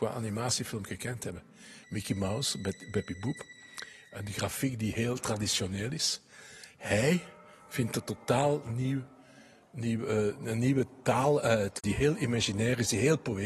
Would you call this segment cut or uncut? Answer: cut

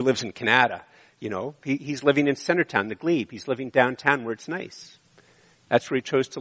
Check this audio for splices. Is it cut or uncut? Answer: uncut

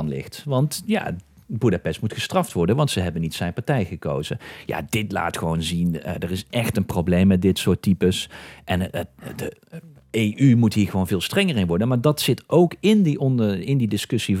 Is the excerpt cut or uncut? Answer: uncut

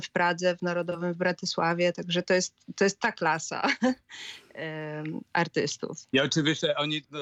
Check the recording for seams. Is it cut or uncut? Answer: cut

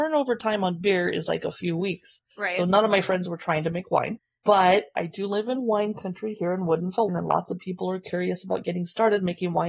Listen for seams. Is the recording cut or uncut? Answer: cut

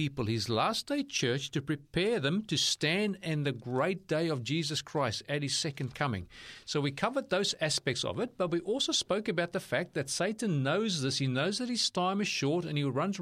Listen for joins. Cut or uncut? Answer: uncut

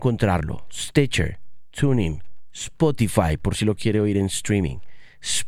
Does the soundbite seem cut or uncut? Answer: uncut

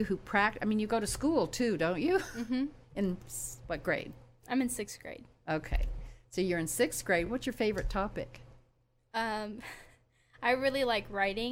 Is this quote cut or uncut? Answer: uncut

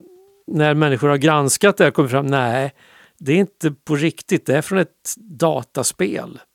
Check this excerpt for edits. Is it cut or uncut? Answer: uncut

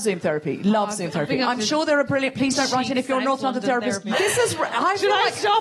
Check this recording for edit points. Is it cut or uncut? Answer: cut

